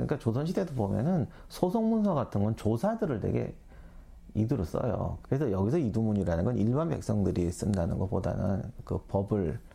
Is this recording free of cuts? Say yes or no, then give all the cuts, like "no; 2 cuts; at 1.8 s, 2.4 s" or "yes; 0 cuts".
no; 1 cut; at 5.2 s